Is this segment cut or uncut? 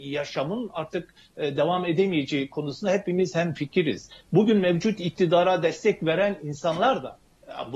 uncut